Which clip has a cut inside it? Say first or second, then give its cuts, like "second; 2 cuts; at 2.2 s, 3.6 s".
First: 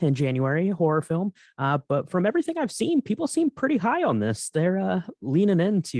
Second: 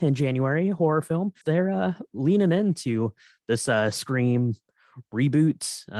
second; 1 cut; at 1.4 s